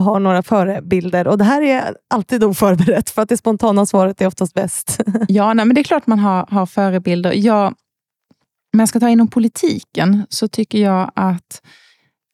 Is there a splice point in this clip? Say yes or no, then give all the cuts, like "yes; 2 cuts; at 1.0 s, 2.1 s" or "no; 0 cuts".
no; 0 cuts